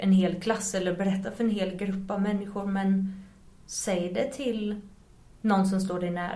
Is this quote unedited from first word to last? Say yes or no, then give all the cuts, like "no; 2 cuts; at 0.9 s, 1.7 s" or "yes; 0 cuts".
yes; 0 cuts